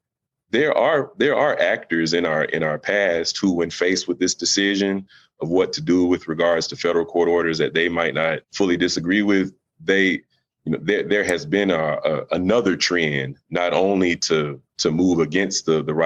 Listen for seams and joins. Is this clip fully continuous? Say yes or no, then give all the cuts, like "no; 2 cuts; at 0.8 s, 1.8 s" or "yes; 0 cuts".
no; 2 cuts; at 8.4 s, 14.7 s